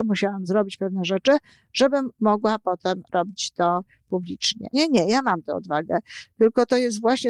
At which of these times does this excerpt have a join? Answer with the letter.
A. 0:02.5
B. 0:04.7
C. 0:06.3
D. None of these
B